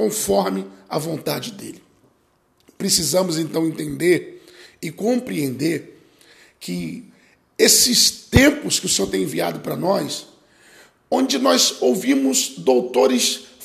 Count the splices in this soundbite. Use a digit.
0